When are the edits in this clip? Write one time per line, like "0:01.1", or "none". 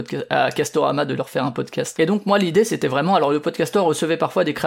0:02.0